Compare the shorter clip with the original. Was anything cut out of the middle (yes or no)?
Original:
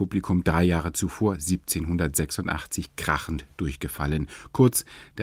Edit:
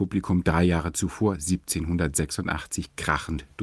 no